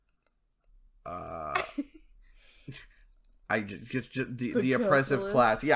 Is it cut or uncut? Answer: uncut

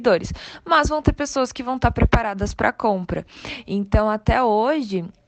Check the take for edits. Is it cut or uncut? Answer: uncut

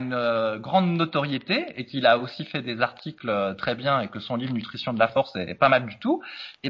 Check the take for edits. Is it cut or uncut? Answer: uncut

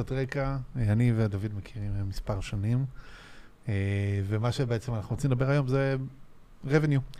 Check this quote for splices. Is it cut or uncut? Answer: uncut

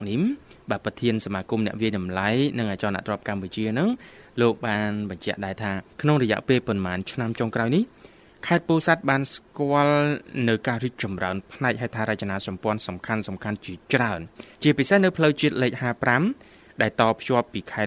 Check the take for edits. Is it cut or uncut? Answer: cut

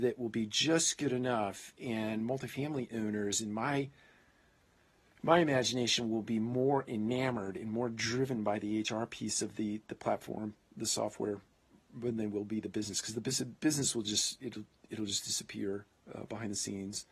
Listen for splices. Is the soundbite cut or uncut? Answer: uncut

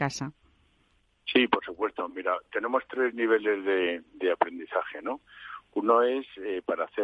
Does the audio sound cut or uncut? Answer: uncut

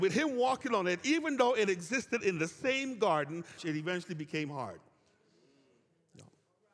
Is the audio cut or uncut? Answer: cut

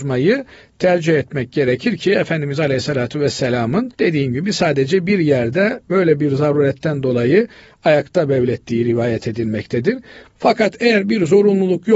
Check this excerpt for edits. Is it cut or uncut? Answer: cut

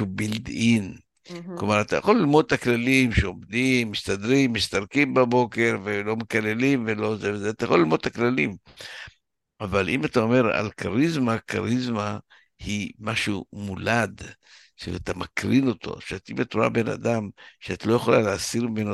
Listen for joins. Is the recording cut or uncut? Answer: uncut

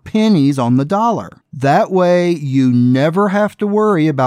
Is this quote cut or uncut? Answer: cut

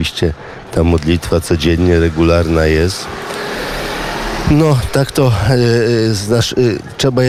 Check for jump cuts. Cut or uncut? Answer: uncut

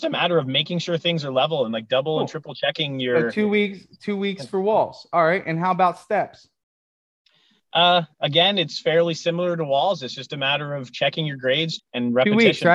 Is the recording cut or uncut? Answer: cut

